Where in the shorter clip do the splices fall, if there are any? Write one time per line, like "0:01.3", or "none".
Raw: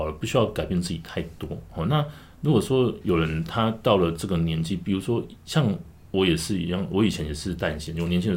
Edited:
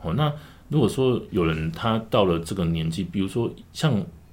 none